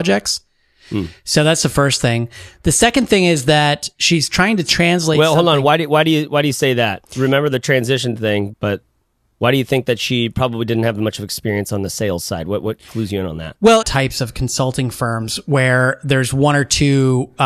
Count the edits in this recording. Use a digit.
2